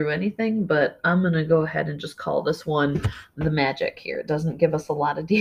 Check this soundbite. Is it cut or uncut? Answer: uncut